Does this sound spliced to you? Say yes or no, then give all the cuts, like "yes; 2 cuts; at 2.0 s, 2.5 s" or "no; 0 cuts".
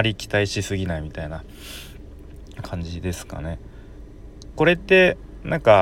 yes; 1 cut; at 4.5 s